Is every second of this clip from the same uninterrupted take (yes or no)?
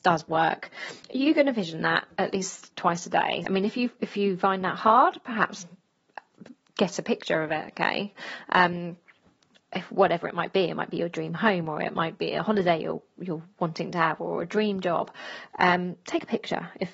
no